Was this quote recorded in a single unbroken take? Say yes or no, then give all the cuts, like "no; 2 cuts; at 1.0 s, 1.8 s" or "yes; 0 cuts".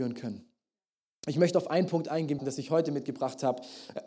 no; 1 cut; at 2.4 s